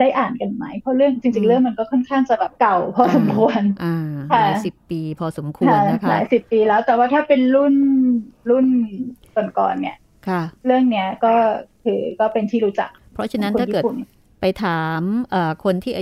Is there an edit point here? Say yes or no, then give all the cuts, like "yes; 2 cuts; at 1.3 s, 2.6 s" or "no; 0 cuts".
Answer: yes; 1 cut; at 2.5 s